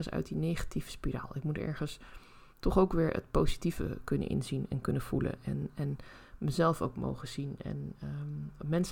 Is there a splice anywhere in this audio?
yes; 1 cut; at 2.5 s

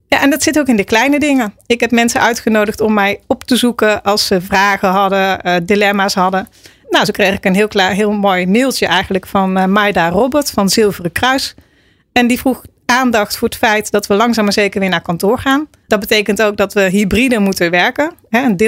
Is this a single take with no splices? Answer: yes; 0 cuts

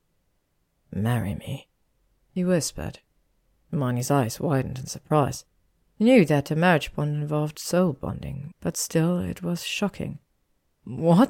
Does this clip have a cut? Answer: yes; 1 cut; at 8.5 s

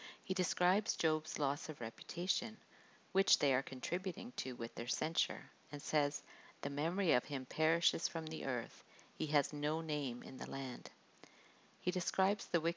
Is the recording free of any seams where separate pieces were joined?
yes; 0 cuts

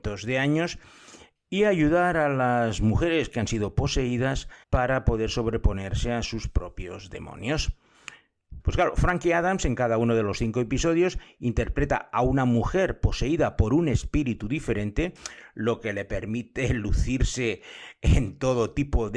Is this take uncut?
no; 2 cuts; at 4.6 s, 8.6 s

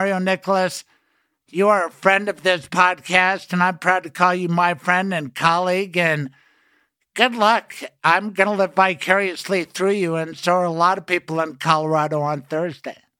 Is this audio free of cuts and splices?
yes; 0 cuts

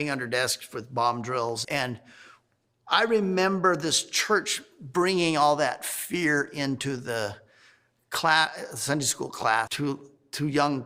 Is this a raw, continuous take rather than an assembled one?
no; 2 cuts; at 1.6 s, 9.7 s

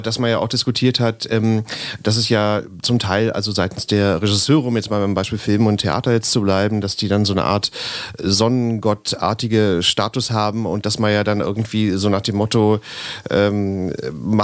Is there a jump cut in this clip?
no; 0 cuts

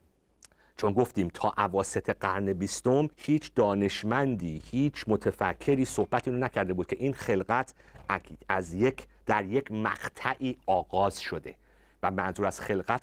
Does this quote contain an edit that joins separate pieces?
yes; 1 cut; at 3.1 s

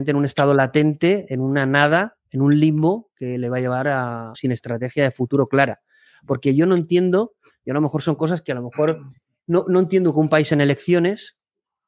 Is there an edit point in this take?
yes; 1 cut; at 4.3 s

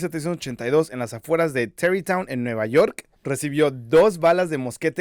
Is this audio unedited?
no; 1 cut; at 3.2 s

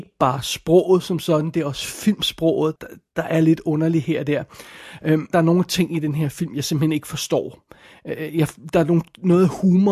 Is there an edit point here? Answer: yes; 2 cuts; at 2.8 s, 5.3 s

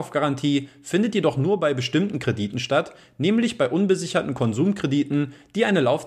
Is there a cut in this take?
no; 0 cuts

